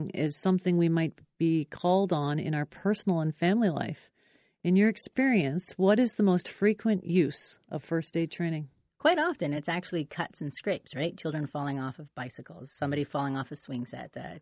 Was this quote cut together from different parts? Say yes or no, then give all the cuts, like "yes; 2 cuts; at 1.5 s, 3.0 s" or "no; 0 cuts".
no; 0 cuts